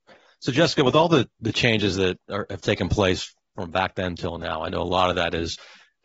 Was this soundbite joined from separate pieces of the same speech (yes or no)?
no